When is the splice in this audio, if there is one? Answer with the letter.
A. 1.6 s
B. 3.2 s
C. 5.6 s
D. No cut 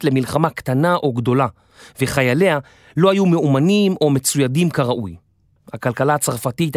C